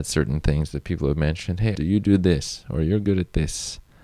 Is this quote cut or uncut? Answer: cut